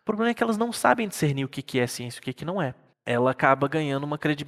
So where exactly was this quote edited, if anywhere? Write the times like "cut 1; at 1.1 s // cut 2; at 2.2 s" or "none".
cut 1; at 2.9 s